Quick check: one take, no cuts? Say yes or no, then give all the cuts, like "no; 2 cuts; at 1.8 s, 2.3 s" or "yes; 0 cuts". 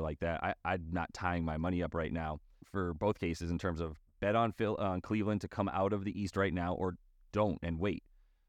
no; 1 cut; at 2.6 s